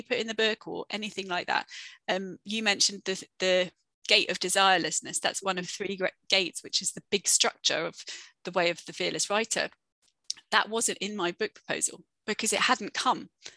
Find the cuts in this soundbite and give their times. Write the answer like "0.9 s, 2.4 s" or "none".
none